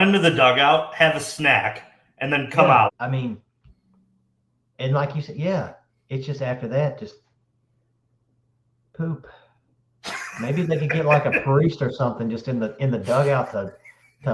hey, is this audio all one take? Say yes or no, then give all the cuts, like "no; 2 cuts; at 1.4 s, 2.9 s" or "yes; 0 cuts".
no; 1 cut; at 2.9 s